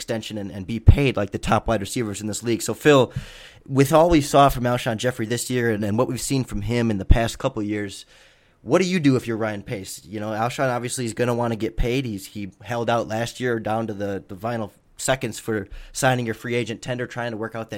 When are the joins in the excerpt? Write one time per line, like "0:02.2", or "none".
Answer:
none